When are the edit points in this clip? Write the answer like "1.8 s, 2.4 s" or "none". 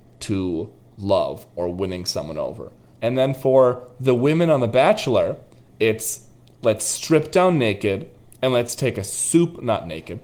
2.9 s